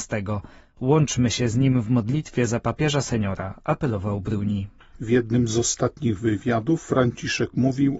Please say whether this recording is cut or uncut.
uncut